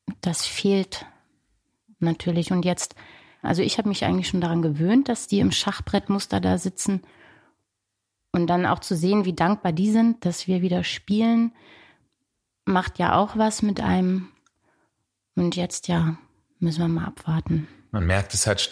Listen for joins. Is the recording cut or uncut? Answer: uncut